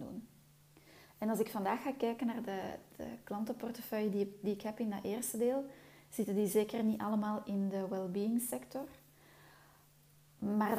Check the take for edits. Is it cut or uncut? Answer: uncut